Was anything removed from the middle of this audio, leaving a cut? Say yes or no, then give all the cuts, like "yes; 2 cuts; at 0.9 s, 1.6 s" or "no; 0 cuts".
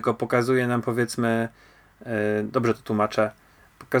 no; 0 cuts